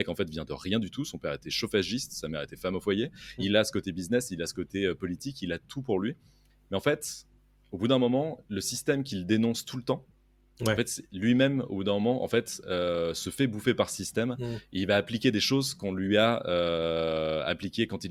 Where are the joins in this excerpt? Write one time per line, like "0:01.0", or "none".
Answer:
0:03.4

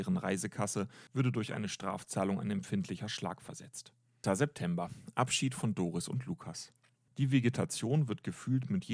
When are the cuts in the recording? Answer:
0:01.1
0:04.2
0:07.1

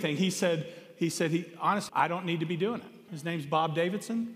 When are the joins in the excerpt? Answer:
0:01.9
0:03.1

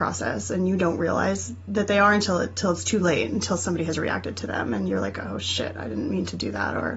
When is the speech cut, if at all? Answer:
none

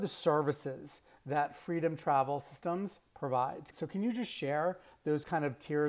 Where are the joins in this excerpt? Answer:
0:03.7

